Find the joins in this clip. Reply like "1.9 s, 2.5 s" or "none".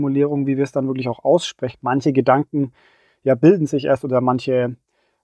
1.7 s

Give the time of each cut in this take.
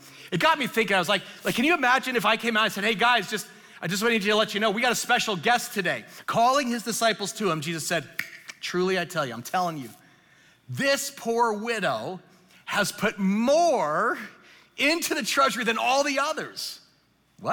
6.2 s

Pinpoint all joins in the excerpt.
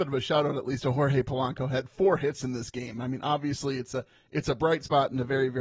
none

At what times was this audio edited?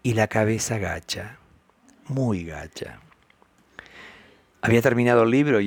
none

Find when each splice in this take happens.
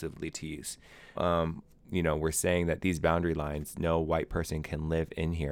1.2 s

